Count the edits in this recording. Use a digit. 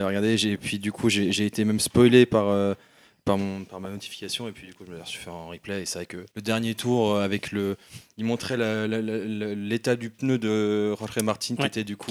1